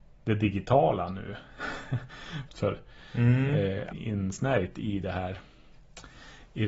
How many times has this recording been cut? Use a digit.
2